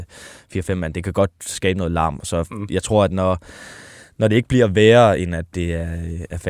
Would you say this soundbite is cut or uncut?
uncut